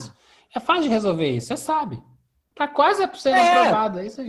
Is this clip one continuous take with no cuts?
no; 1 cut; at 2.5 s

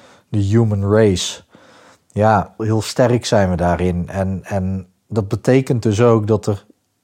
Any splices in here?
yes; 1 cut; at 2.6 s

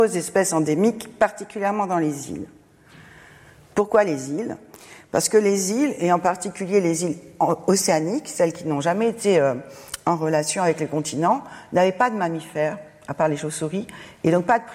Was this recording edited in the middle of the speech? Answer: no; 0 cuts

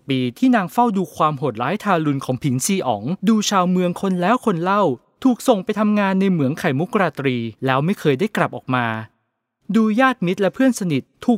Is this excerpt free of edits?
no; 2 cuts; at 3.2 s, 7.6 s

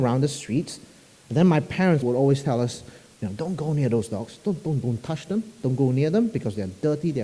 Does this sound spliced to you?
yes; 1 cut; at 2.0 s

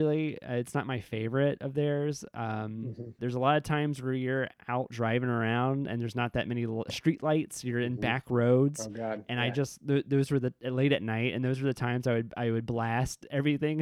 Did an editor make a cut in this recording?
yes; 1 cut; at 3.2 s

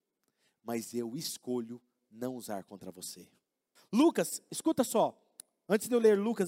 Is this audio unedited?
no; 1 cut; at 3.8 s

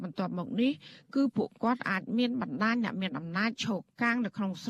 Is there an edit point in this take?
no; 0 cuts

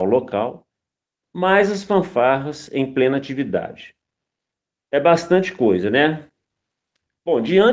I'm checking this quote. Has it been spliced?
no; 0 cuts

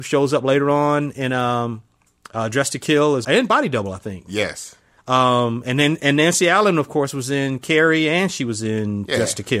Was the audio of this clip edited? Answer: yes; 1 cut; at 3.2 s

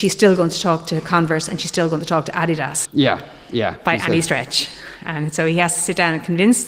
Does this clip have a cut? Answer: yes; 1 cut; at 2.8 s

